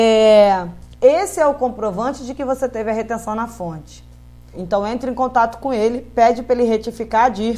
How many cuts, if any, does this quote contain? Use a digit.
2